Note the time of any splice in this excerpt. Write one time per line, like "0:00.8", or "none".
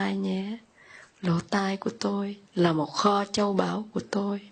0:02.5